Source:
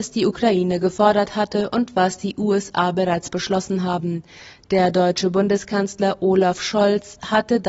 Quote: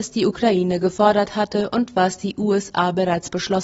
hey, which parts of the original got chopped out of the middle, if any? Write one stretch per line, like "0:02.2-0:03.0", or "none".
none